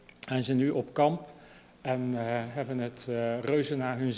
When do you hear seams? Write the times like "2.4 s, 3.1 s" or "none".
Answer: none

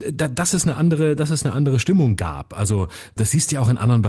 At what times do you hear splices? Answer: 3.2 s

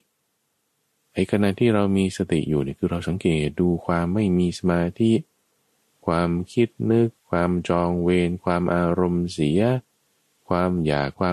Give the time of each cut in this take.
none

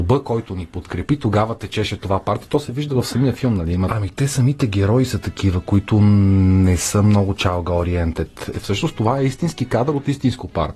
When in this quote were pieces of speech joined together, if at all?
3.9 s, 8.5 s

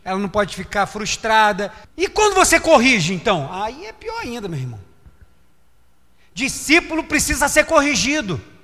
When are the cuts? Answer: 1.8 s

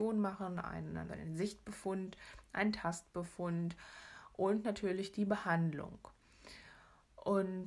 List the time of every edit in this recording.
1.1 s

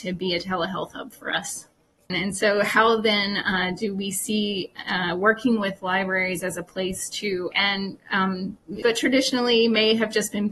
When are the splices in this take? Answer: 2.1 s, 7.5 s, 8.8 s

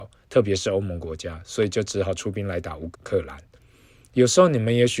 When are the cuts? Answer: 2.9 s

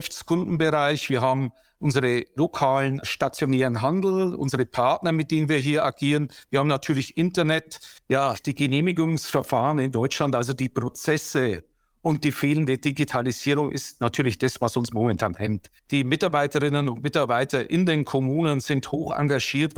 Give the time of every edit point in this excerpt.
8.0 s, 15.8 s

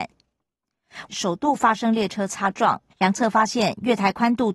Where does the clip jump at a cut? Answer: 1.1 s, 2.9 s

